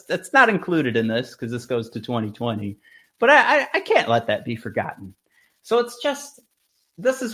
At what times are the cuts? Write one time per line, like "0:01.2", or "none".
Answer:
none